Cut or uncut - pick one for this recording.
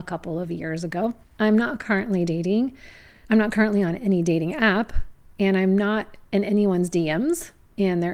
uncut